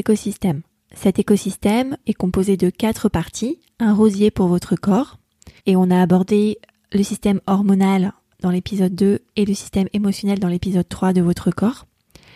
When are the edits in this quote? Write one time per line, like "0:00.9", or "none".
0:02.0
0:05.6